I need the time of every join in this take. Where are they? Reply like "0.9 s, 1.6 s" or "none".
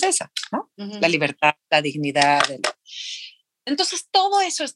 none